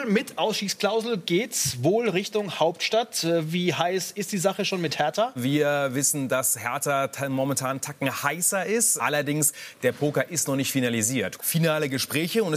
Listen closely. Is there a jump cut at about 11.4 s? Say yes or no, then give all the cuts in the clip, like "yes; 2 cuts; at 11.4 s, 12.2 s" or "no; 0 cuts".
yes; 3 cuts; at 5.4 s, 9.0 s, 11.4 s